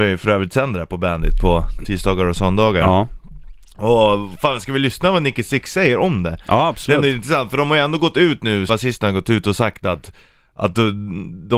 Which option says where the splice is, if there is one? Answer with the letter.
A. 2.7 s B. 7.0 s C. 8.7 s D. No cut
C